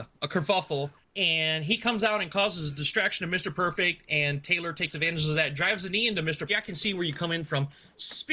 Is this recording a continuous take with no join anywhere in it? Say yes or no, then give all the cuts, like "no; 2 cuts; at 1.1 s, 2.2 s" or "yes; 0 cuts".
no; 1 cut; at 6.5 s